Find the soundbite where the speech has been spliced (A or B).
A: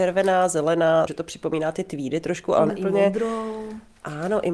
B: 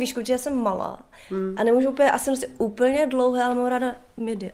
A